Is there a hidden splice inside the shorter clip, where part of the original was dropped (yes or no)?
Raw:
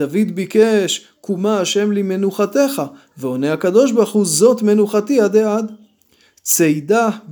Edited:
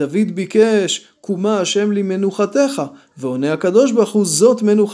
no